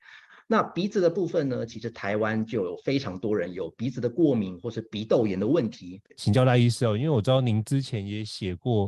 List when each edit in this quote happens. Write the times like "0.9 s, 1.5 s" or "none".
6.1 s